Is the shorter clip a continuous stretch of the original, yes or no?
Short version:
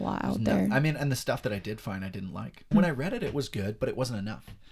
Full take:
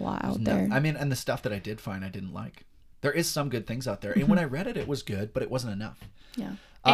no